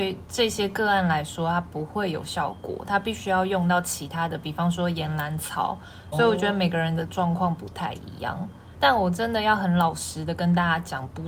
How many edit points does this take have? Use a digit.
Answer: 2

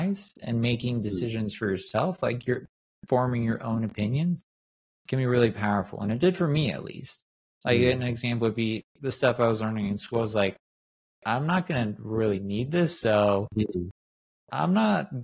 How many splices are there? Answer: 0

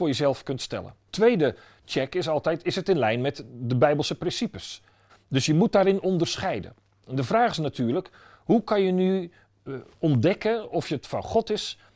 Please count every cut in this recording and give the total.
2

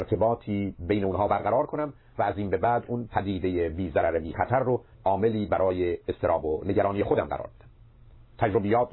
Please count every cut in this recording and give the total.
1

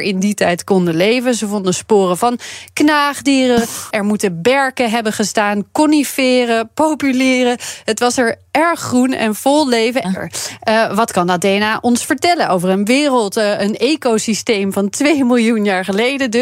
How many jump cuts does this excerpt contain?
2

